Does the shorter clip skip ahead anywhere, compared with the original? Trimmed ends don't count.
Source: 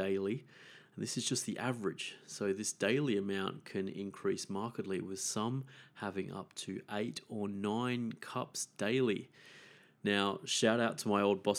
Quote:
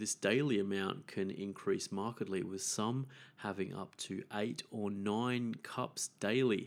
no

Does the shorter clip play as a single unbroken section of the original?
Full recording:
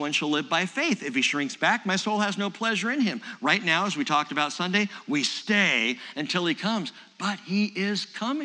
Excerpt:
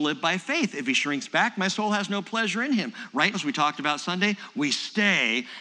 no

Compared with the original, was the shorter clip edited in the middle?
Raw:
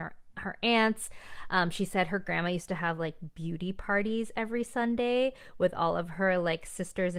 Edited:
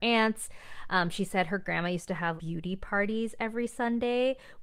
yes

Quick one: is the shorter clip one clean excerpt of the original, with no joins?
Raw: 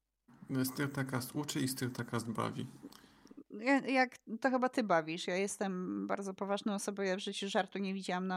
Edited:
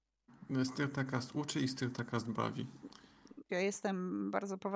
no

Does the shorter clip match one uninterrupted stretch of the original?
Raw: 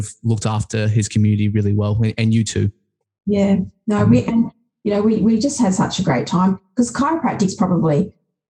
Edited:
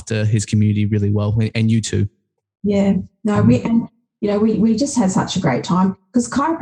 yes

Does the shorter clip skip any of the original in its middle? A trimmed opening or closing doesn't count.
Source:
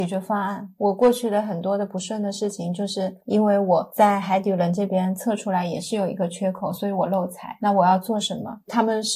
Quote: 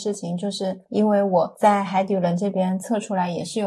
no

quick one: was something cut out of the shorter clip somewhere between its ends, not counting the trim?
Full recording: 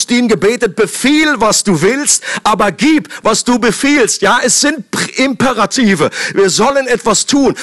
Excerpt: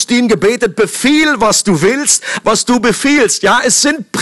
yes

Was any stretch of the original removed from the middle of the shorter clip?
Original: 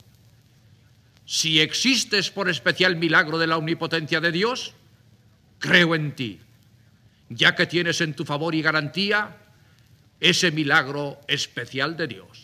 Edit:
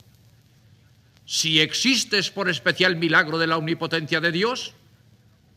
no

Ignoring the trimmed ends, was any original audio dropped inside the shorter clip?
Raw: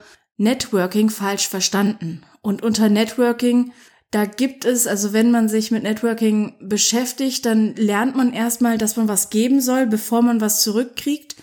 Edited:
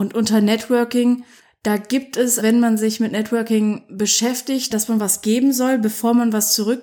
yes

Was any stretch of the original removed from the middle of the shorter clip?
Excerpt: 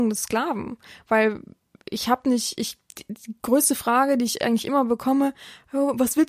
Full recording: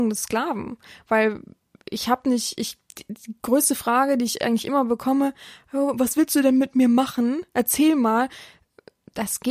no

